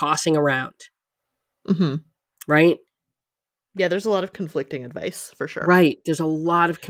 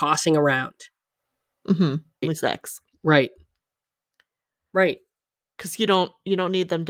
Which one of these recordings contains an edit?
second; 1 cut; at 2.2 s

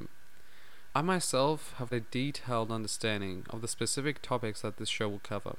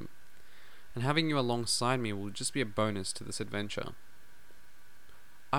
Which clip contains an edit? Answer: first; 2 cuts; at 0.9 s, 1.9 s

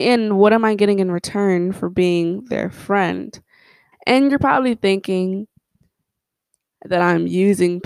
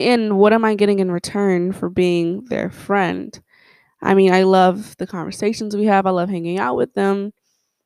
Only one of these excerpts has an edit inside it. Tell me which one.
first; 1 cut; at 3.9 s

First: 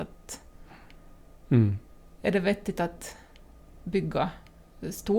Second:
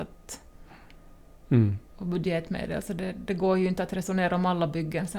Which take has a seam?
second; 1 cut; at 1.9 s

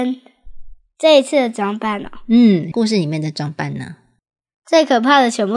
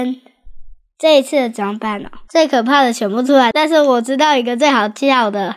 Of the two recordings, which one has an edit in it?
second; 1 cut; at 2.3 s

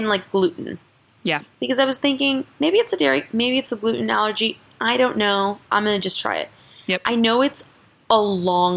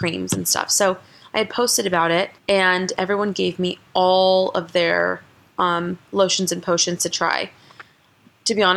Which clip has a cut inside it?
second; 1 cut; at 2.4 s

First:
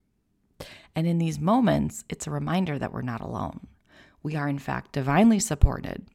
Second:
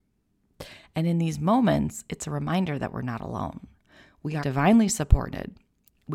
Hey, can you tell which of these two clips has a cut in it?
second; 1 cut; at 4.4 s

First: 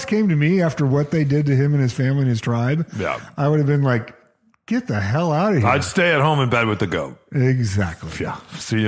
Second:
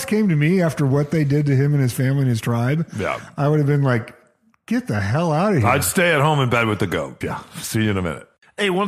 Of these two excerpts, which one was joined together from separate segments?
second; 1 cut; at 7.2 s

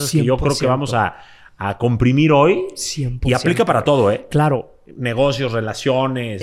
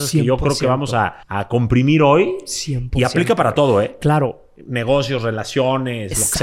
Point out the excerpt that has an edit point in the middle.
second; 1 cut; at 1.2 s

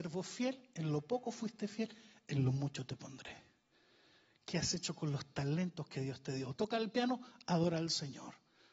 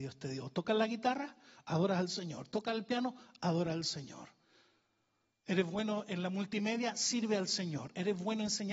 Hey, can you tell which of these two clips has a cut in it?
first; 1 cut; at 6.5 s

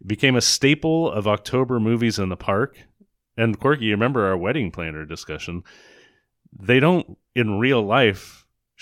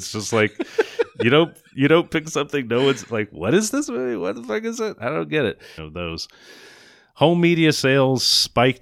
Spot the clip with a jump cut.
second; 1 cut; at 5.8 s

